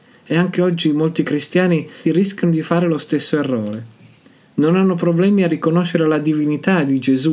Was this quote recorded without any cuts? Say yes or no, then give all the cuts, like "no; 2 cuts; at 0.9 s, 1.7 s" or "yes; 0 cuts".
no; 1 cut; at 2.0 s